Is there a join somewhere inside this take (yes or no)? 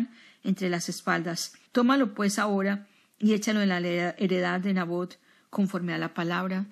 yes